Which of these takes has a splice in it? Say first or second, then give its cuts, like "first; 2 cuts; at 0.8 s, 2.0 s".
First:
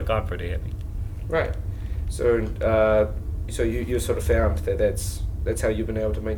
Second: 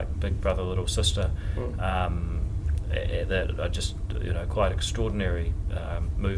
first; 1 cut; at 1.2 s